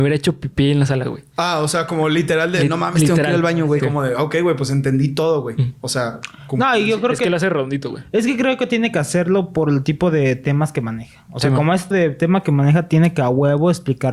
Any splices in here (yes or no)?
yes